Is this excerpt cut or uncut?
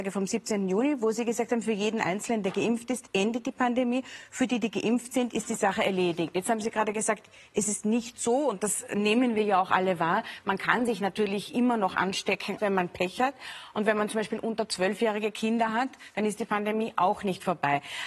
cut